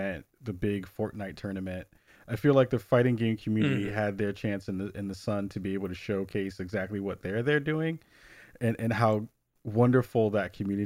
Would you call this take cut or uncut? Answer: uncut